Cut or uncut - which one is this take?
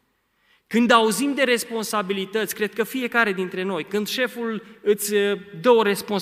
uncut